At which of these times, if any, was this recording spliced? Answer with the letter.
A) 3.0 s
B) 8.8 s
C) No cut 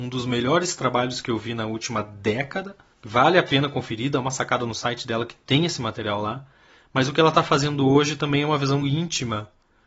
B